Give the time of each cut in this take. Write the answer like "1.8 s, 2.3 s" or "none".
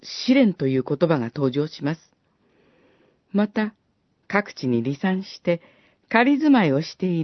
4.2 s